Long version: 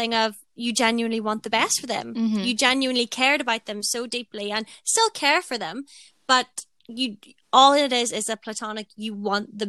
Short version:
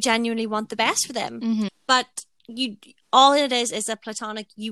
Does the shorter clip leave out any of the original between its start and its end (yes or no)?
yes